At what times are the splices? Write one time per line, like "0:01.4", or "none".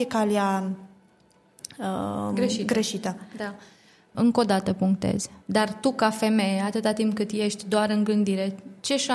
0:04.1
0:05.4